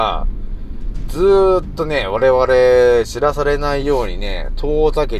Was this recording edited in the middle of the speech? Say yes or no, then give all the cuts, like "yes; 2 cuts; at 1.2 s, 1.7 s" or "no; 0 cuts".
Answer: no; 0 cuts